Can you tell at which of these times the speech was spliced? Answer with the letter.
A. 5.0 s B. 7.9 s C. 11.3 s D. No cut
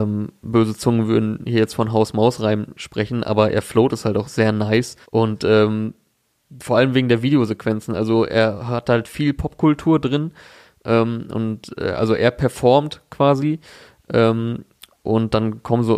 A